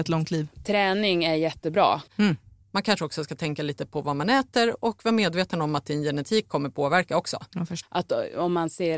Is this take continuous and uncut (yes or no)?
no